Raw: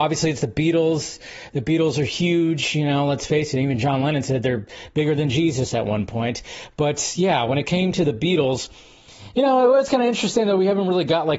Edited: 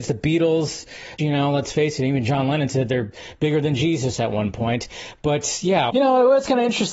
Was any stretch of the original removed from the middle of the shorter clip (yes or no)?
yes